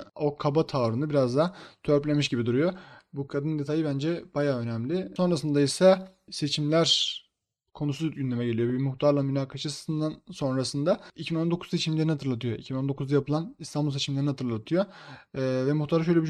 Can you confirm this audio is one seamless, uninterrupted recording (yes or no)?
yes